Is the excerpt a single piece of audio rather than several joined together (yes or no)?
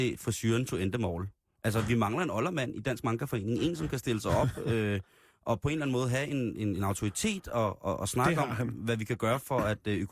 yes